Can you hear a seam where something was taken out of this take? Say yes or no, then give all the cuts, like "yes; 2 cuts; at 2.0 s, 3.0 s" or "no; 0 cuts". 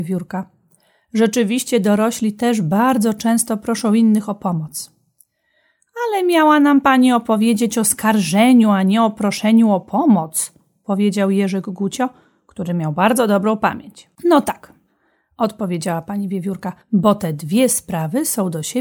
yes; 2 cuts; at 14.2 s, 16.8 s